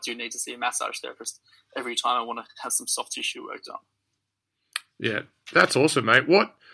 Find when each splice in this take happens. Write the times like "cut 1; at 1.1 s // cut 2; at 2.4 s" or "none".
none